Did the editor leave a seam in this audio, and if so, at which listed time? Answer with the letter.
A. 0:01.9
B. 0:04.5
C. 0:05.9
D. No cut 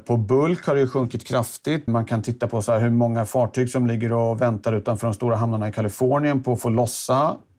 A